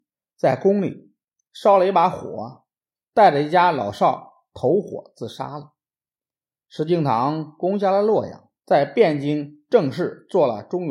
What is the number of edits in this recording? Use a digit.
1